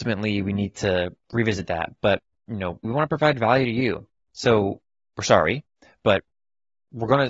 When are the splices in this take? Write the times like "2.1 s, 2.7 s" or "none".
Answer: 2.8 s, 4.2 s